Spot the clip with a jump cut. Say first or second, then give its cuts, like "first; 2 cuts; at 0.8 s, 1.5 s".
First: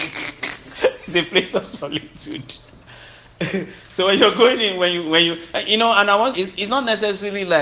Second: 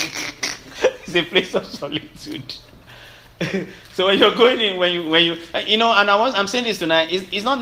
first; 1 cut; at 6.3 s